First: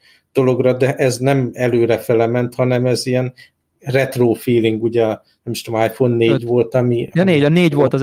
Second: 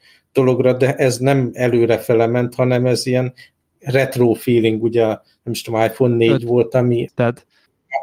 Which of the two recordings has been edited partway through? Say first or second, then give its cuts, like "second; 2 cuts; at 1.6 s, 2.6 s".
second; 1 cut; at 7.1 s